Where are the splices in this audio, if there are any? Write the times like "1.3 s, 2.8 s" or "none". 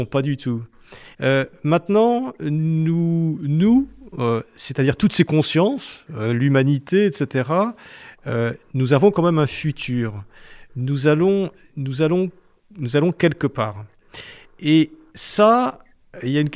1.1 s